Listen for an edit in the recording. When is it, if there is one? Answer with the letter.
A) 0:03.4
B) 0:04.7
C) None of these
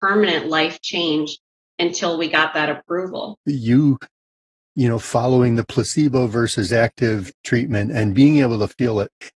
A